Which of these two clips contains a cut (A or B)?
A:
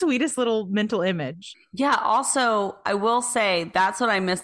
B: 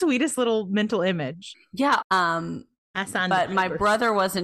B